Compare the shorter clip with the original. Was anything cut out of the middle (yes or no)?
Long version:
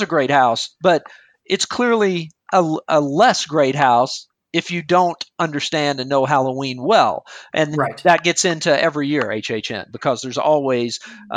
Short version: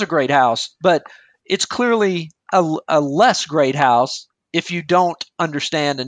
no